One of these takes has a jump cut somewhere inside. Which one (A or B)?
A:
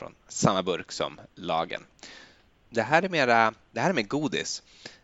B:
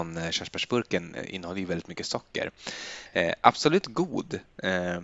A